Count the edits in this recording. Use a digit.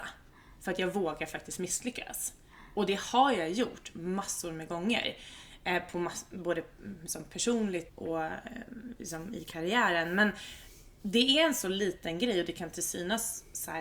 1